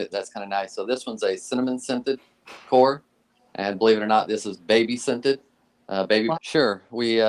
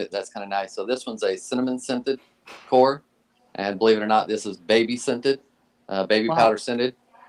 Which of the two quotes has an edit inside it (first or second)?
first